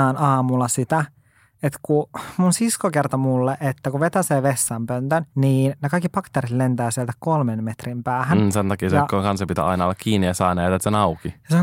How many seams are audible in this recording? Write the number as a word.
one